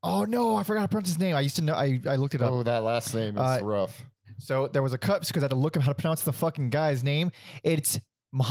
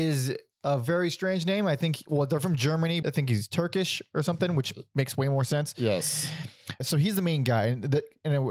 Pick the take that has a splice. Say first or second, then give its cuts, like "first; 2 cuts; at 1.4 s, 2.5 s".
second; 2 cuts; at 3.0 s, 6.8 s